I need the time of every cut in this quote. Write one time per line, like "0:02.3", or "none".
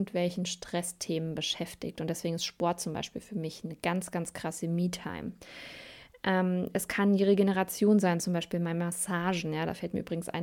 none